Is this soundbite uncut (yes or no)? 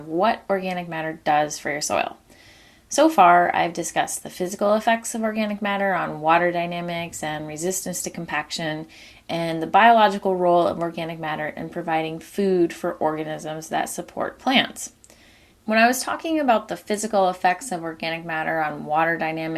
no